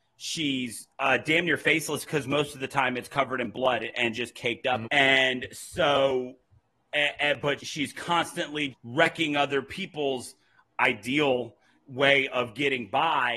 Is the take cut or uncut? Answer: cut